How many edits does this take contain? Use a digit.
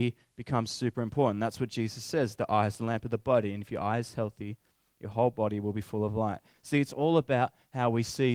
0